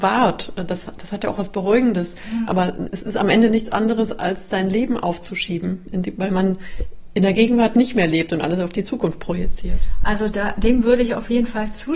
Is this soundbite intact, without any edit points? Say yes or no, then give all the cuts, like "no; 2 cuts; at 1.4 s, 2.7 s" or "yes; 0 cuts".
no; 1 cut; at 2.5 s